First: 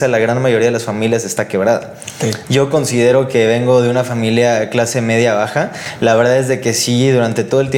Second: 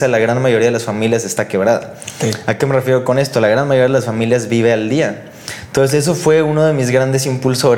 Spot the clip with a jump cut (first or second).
first